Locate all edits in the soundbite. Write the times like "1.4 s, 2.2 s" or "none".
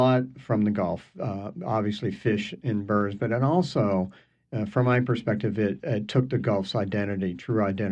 5.8 s

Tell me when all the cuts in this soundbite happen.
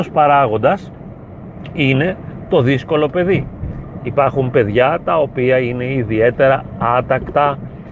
4.0 s

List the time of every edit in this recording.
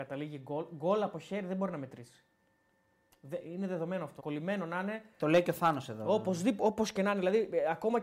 4.2 s

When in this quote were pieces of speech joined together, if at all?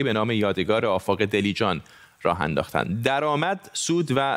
none

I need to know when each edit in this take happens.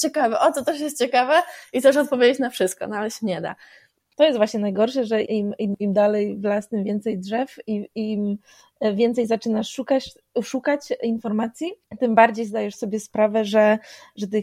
5.2 s

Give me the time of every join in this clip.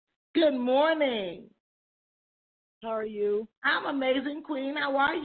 3.5 s

